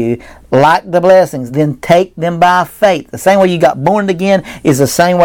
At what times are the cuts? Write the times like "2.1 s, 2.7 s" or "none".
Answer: none